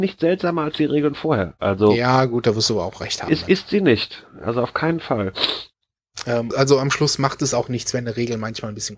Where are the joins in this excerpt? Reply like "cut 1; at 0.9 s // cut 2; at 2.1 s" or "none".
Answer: cut 1; at 6.5 s